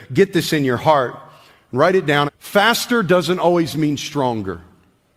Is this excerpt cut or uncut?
cut